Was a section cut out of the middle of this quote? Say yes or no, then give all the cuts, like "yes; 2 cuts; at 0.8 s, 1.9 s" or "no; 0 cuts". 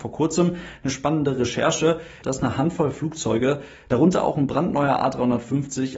yes; 1 cut; at 2.2 s